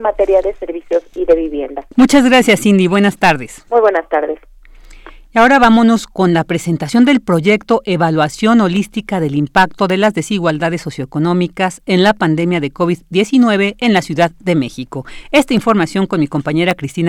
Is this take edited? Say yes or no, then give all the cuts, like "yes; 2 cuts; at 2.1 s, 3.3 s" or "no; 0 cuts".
yes; 1 cut; at 1.9 s